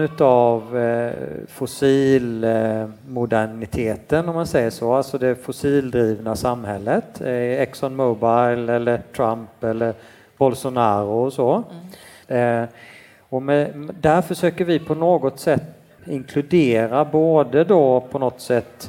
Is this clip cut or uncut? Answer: cut